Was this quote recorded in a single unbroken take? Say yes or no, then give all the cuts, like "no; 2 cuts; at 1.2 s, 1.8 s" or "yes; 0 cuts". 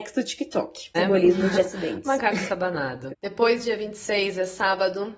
no; 2 cuts; at 0.9 s, 3.1 s